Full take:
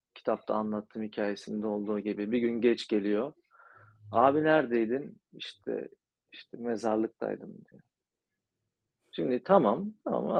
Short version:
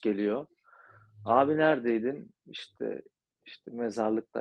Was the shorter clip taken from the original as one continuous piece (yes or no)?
yes